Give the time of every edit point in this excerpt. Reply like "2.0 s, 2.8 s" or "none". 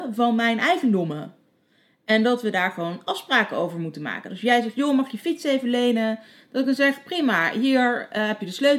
none